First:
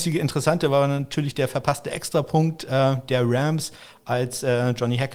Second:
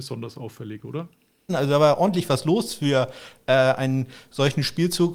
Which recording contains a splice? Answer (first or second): second